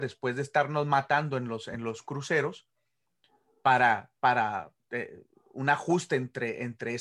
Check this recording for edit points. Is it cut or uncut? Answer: uncut